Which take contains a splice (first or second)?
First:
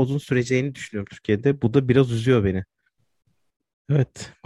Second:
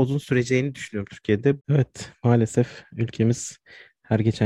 second